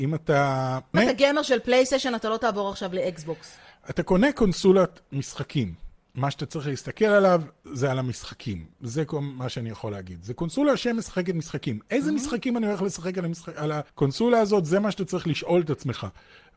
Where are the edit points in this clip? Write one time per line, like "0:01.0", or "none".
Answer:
0:00.9
0:13.9